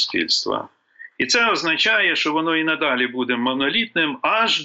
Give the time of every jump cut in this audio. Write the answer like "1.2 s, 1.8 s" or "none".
none